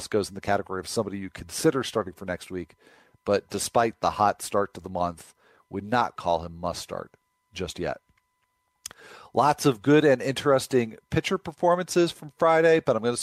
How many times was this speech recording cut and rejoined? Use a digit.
1